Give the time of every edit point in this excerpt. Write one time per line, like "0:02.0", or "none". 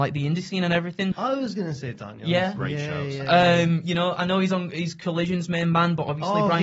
0:01.1